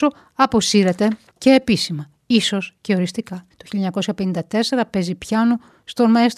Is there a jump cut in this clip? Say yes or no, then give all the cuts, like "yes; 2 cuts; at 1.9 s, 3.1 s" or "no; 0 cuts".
yes; 1 cut; at 3.5 s